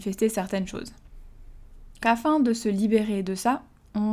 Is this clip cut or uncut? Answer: cut